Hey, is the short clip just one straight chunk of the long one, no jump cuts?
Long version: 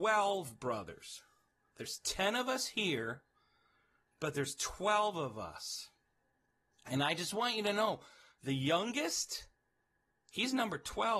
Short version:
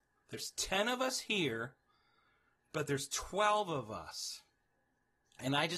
yes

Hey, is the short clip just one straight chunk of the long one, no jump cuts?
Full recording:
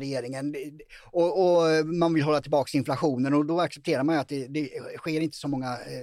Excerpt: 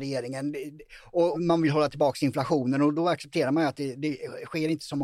no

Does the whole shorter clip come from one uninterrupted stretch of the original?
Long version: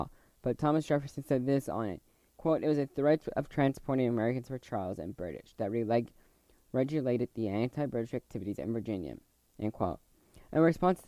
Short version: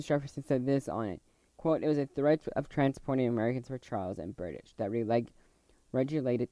yes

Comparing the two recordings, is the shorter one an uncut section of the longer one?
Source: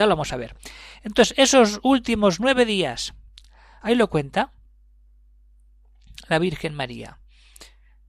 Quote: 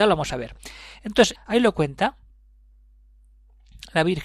no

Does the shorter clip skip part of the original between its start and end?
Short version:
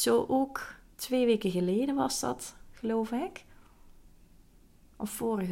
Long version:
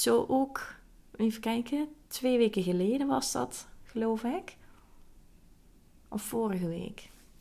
yes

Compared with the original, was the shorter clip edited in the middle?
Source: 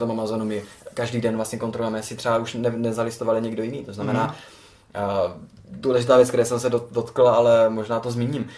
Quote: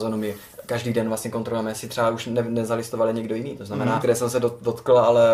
yes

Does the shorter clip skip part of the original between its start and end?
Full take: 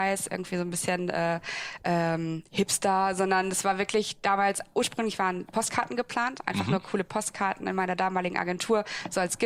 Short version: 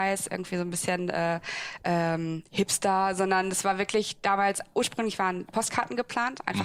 no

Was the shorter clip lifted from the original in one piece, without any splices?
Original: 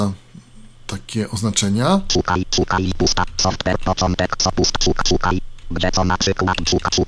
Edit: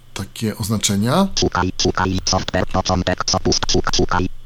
no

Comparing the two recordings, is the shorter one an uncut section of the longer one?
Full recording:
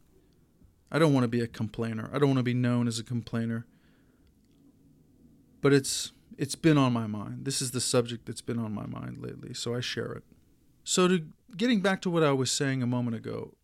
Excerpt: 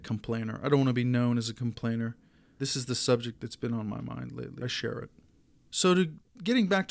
no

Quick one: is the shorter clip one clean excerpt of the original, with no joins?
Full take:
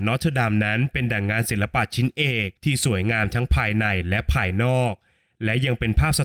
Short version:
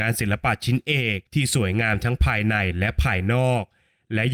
yes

